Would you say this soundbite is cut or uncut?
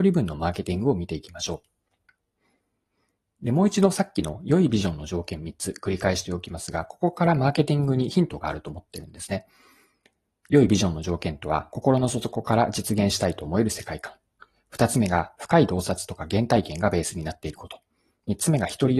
uncut